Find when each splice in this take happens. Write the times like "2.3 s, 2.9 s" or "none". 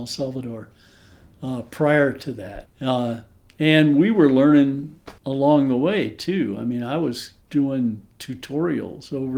2.7 s, 5.2 s, 7.4 s